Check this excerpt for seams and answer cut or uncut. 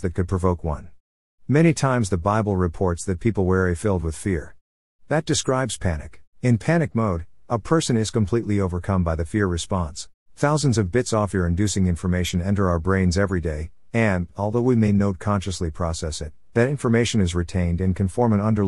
cut